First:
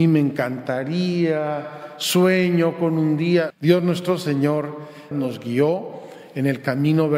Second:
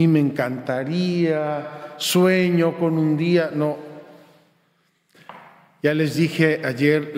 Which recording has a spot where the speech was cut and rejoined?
first; 2 cuts; at 3.5 s, 5.1 s

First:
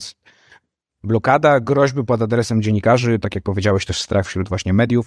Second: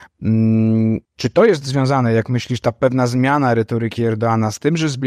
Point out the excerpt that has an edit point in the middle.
second; 1 cut; at 1.1 s

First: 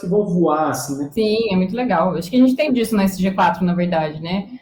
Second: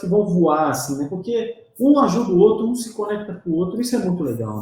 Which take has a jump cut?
first; 2 cuts; at 1.1 s, 2.7 s

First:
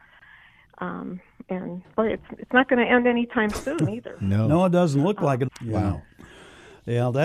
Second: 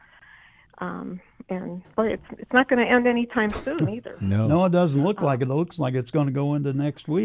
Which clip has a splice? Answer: first; 1 cut; at 5.5 s

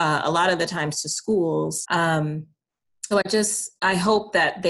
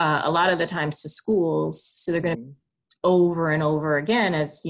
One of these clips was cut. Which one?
first; 2 cuts; at 1.8 s, 3.1 s

